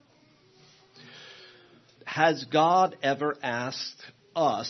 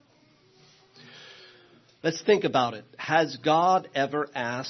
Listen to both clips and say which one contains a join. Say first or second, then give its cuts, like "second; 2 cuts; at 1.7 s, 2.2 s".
first; 1 cut; at 2.0 s